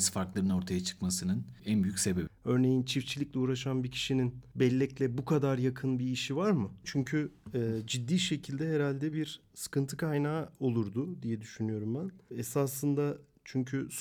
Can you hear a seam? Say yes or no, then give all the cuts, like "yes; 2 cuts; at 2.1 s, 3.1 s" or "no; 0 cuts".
yes; 2 cuts; at 2.3 s, 6.8 s